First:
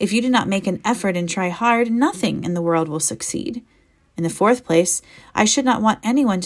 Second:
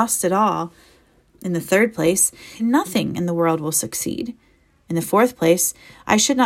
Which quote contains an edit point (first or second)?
second